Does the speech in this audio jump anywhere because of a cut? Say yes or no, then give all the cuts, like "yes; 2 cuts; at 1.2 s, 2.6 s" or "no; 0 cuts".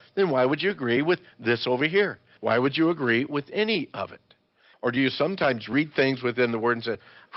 yes; 2 cuts; at 2.4 s, 4.7 s